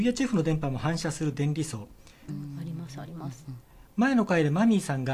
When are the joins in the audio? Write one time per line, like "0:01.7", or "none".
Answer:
0:02.3